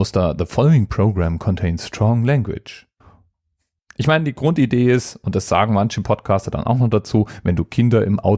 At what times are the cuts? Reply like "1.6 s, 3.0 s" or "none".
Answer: 3.8 s